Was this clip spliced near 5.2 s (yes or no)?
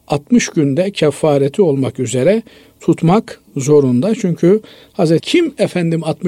yes